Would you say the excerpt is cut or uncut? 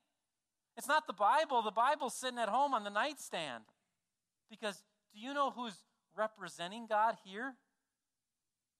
cut